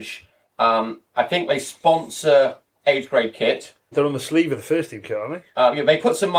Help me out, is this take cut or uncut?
cut